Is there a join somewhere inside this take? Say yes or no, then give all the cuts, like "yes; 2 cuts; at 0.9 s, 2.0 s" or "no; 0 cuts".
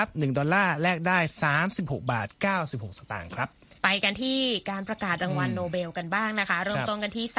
yes; 1 cut; at 3.8 s